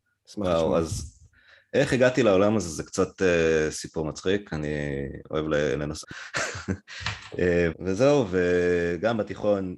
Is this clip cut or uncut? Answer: cut